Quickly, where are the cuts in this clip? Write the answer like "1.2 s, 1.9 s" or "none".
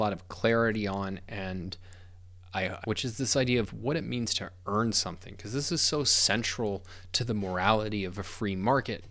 2.8 s